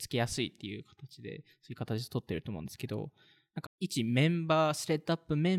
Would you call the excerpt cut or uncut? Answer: cut